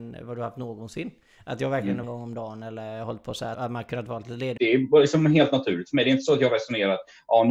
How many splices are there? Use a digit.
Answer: 3